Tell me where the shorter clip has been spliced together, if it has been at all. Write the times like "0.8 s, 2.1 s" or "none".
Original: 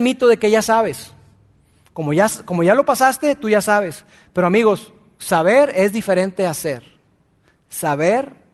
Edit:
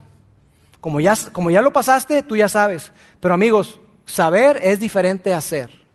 none